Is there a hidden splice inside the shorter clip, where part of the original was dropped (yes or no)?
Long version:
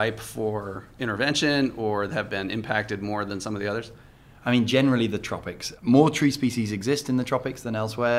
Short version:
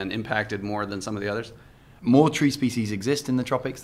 yes